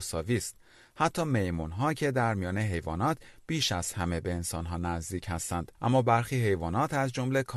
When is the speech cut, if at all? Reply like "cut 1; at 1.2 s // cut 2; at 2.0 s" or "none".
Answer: cut 1; at 5.7 s